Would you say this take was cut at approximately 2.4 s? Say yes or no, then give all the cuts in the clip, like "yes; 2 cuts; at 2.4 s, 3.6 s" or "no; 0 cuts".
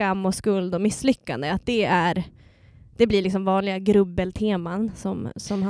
no; 0 cuts